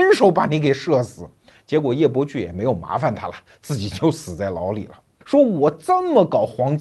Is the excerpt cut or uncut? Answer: cut